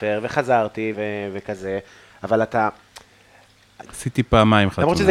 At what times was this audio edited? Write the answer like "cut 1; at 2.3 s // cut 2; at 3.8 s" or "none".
cut 1; at 0.9 s // cut 2; at 3.9 s